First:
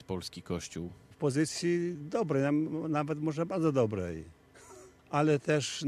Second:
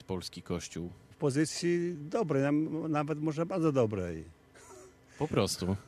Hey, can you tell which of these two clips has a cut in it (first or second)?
first